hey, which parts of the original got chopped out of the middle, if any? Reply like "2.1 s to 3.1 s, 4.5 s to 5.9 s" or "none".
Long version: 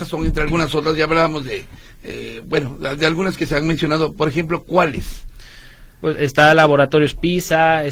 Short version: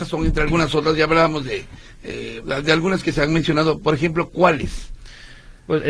2.4 s to 2.8 s